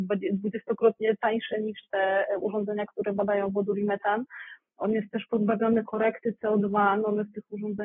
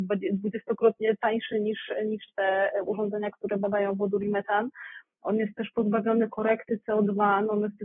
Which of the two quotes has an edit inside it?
first; 1 cut; at 1.5 s

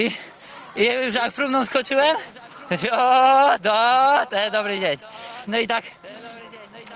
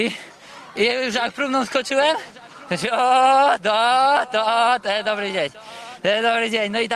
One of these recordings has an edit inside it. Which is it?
first; 2 cuts; at 4.3 s, 5.5 s

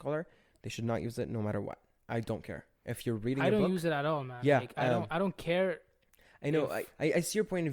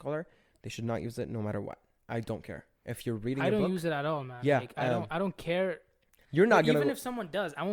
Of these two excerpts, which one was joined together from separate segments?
second; 1 cut; at 6.2 s

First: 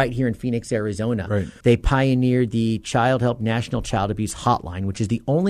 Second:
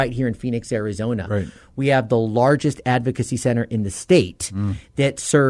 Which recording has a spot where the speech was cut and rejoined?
first; 1 cut; at 1.6 s

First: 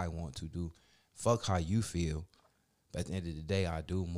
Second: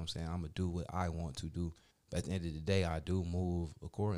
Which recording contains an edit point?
second; 1 cut; at 1.9 s

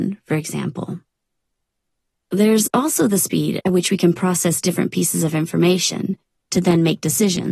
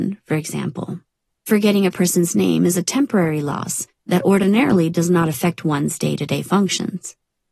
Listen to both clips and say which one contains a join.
second; 1 cut; at 1.3 s

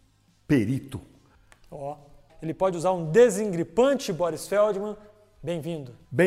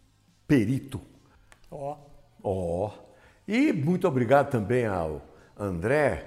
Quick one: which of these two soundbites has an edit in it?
first; 1 cut; at 2.3 s

